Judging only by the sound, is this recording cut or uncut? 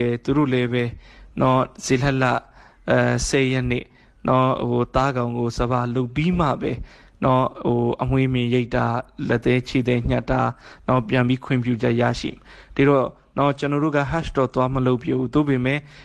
uncut